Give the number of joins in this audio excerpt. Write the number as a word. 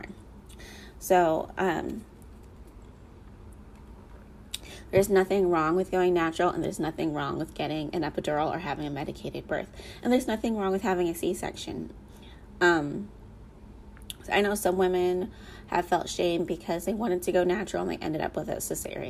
zero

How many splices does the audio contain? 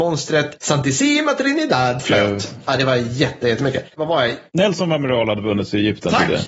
two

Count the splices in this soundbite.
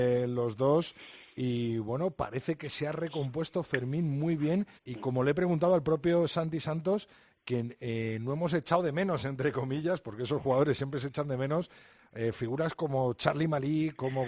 one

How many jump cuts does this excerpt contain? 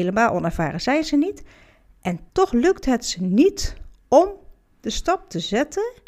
one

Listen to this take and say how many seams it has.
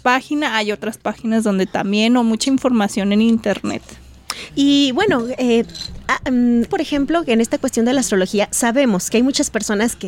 two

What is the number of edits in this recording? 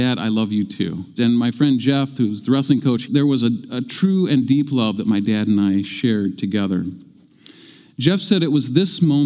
two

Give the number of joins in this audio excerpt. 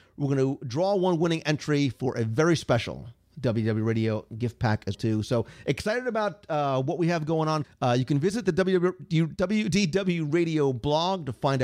two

